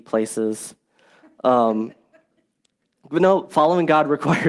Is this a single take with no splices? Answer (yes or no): yes